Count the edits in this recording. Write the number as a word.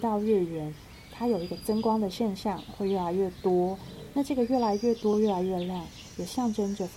zero